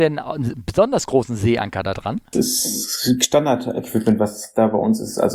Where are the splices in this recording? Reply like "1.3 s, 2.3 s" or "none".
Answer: 2.3 s